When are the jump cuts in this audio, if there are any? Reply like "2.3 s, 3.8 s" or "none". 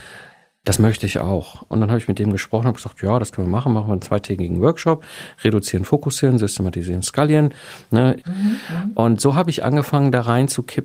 1.7 s, 8.2 s